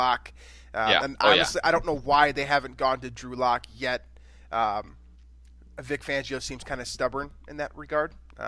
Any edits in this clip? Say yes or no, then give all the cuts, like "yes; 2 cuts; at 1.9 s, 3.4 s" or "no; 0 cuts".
no; 0 cuts